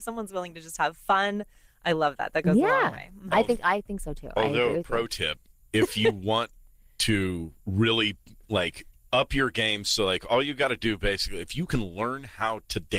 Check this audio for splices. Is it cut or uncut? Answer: uncut